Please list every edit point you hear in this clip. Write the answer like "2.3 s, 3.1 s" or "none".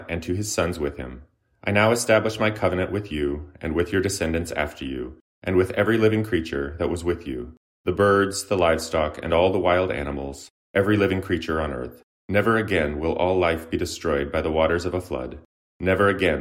10.6 s, 12.2 s